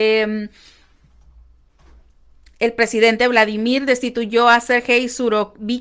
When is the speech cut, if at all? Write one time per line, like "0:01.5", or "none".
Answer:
none

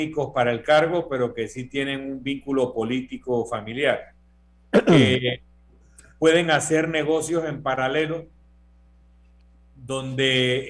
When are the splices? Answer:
none

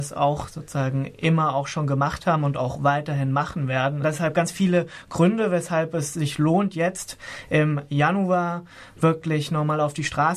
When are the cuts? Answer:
0:04.0

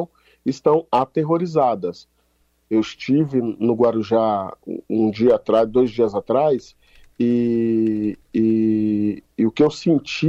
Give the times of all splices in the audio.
none

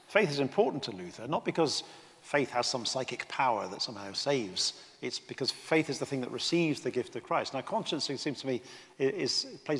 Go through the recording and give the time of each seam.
none

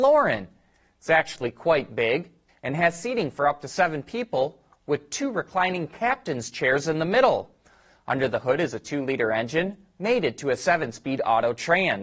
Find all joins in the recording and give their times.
0:02.5

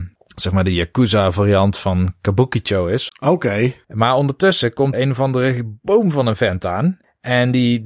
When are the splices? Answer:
0:03.1
0:04.9

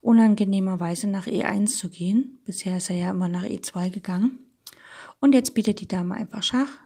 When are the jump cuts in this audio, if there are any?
none

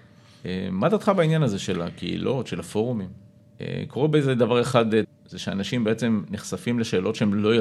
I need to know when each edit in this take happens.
0:03.4
0:05.0

